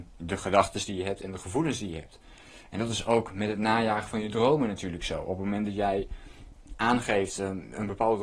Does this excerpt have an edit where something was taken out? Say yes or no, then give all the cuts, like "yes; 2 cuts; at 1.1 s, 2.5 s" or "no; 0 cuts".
no; 0 cuts